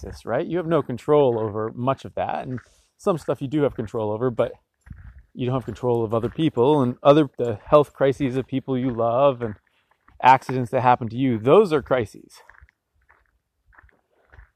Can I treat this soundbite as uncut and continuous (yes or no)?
no